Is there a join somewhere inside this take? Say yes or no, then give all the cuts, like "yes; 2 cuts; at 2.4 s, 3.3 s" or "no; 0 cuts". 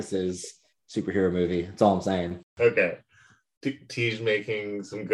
no; 0 cuts